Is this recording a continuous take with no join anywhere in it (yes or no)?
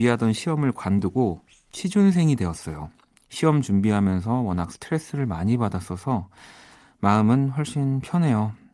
yes